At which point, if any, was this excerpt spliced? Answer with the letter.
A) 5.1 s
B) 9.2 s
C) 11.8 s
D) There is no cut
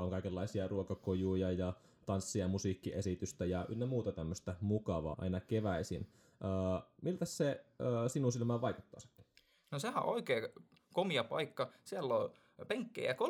A